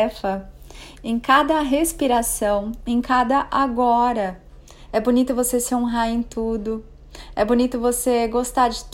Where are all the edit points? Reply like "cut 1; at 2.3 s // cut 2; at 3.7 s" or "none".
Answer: cut 1; at 1.0 s // cut 2; at 4.9 s